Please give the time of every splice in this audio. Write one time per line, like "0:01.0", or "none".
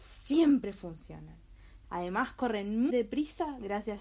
0:01.8
0:02.9